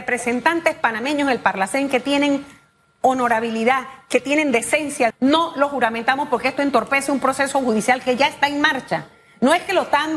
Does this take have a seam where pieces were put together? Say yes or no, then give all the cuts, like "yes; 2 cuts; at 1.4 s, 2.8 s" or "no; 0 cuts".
yes; 1 cut; at 5.1 s